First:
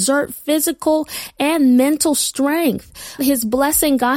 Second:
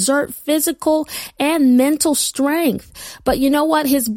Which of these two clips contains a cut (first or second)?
first